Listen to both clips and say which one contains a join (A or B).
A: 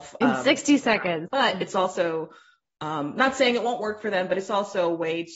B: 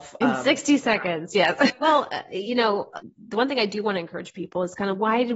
A